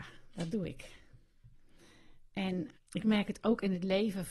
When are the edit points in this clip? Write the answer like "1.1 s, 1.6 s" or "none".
2.8 s